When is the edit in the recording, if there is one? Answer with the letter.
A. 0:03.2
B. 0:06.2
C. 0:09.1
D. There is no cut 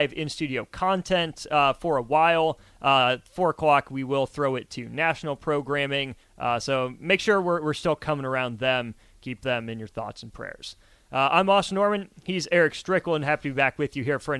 B